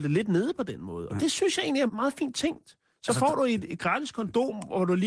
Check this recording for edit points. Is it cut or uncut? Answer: cut